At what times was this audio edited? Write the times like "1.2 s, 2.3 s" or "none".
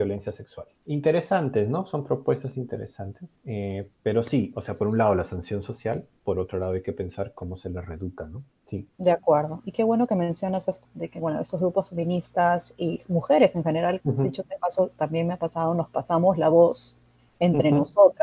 10.8 s, 14.0 s